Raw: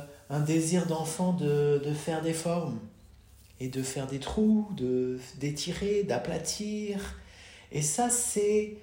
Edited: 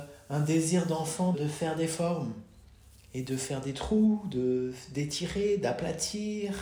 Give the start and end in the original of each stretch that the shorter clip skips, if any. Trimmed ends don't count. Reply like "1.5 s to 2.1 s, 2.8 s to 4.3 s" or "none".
1.3 s to 1.8 s